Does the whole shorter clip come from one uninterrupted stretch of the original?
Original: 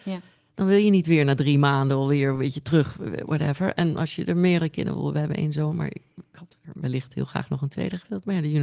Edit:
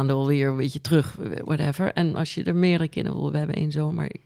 yes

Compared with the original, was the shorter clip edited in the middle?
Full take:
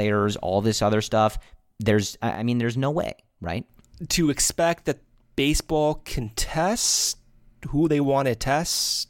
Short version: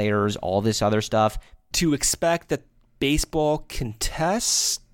yes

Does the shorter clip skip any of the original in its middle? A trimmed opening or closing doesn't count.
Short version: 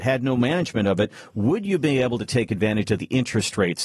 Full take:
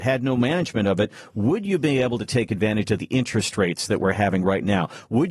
no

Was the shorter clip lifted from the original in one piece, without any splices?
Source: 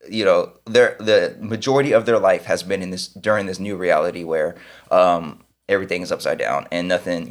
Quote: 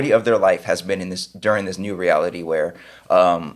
yes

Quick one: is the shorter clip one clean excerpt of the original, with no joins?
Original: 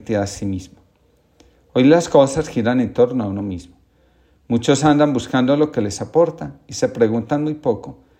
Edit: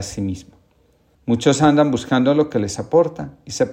no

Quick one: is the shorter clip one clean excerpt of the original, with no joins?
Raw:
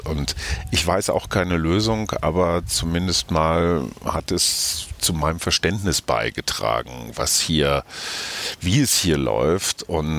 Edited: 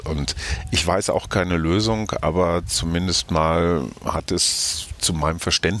yes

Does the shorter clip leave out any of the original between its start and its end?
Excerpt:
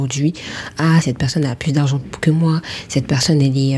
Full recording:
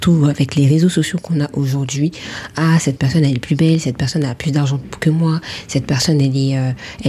yes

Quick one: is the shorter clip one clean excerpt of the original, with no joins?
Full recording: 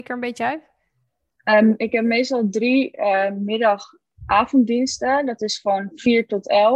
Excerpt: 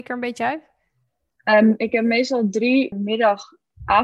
no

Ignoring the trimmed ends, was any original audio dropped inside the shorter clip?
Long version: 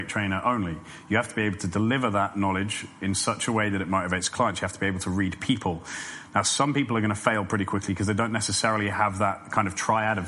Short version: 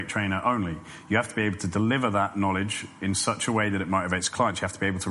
no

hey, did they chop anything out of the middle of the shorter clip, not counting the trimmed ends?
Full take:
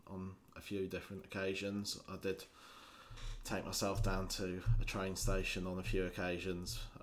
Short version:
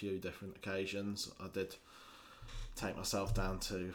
no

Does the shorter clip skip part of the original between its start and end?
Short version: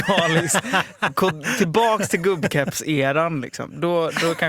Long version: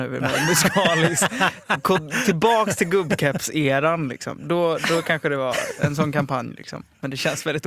no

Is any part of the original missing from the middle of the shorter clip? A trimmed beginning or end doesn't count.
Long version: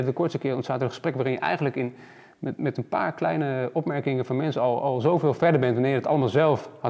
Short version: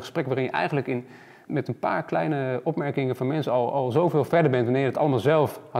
yes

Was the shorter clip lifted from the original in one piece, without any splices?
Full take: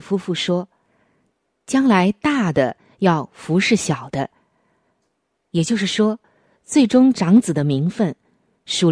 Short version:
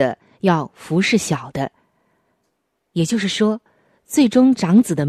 yes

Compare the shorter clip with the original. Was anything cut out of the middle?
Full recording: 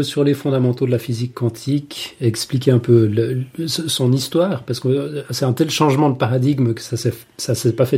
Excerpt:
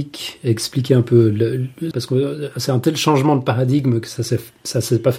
yes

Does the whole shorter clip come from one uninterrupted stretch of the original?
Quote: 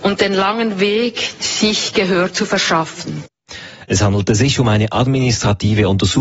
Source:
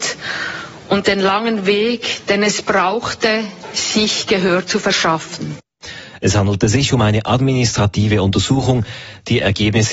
no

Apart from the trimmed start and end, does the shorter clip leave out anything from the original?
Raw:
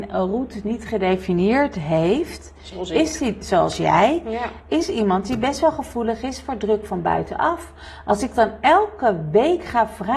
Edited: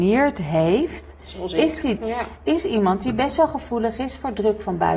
yes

